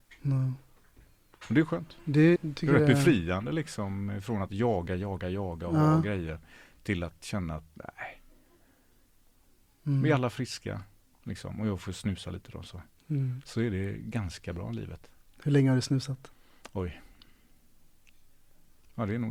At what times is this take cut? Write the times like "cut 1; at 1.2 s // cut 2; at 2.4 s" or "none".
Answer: cut 1; at 2.4 s